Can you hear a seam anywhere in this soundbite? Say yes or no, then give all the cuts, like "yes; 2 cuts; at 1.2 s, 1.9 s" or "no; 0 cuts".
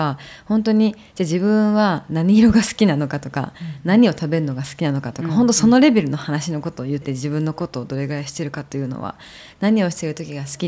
yes; 1 cut; at 7.0 s